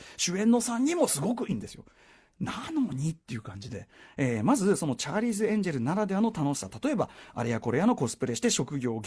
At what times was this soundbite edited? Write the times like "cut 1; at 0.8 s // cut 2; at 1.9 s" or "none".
cut 1; at 1.5 s